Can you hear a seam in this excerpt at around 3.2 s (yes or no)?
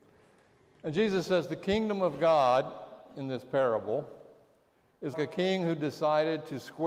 no